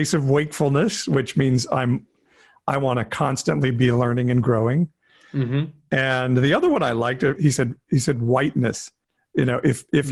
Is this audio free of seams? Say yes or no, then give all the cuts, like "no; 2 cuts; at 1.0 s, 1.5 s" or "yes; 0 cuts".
no; 1 cut; at 7.4 s